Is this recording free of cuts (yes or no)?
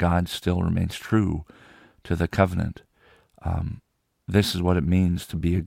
yes